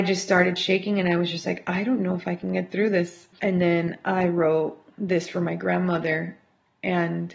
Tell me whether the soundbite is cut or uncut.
cut